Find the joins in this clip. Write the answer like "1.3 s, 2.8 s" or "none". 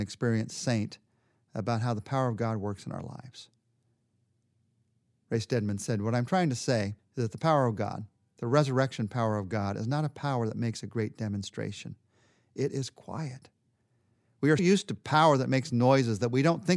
14.6 s